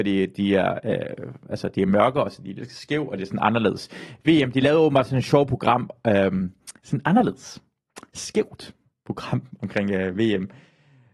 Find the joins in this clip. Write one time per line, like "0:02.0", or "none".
none